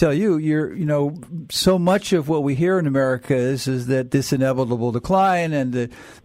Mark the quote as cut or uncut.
uncut